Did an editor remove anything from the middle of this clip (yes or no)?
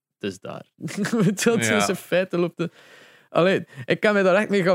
no